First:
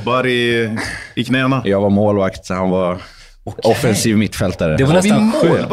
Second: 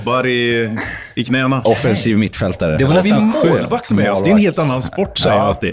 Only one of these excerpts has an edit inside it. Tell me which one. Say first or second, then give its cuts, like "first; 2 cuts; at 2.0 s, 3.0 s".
second; 1 cut; at 1.6 s